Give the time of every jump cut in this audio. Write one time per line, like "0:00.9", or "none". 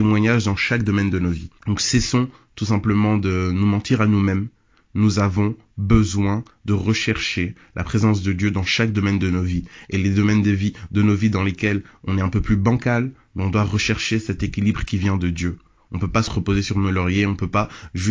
0:01.6

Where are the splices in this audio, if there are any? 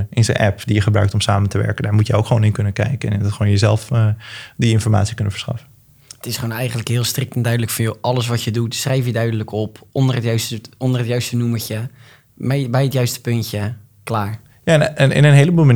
none

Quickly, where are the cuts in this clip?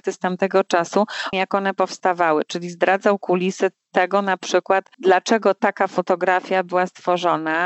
0:01.3

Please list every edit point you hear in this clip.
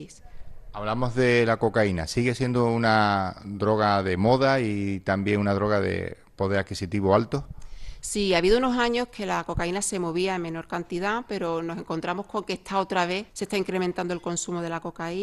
0:13.3

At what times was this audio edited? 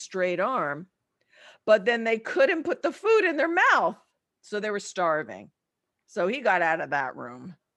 none

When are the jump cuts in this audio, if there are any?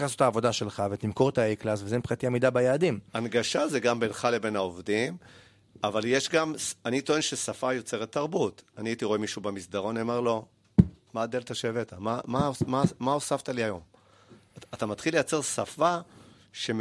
none

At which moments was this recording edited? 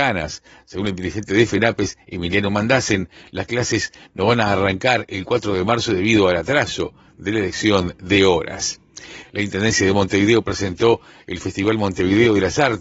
0:09.2

